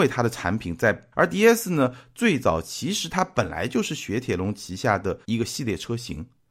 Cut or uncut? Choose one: cut